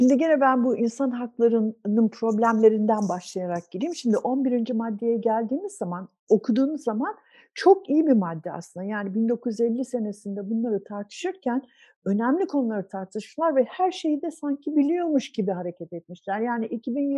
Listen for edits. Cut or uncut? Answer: uncut